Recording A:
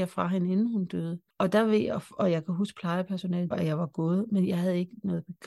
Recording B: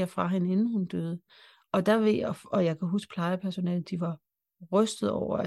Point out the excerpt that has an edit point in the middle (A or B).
A